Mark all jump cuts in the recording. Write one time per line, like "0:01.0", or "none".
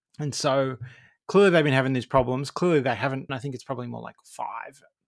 0:03.3